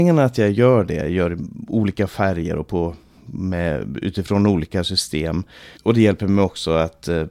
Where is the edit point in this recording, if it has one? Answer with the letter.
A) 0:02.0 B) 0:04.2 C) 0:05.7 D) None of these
C